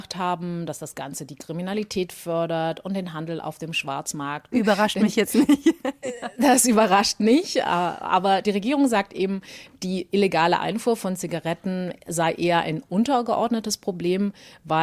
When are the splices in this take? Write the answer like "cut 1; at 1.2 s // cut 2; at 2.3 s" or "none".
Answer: cut 1; at 4.5 s